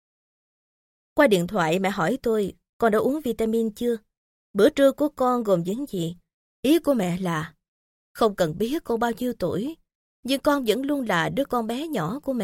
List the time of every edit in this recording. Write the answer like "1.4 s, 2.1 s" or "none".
6.4 s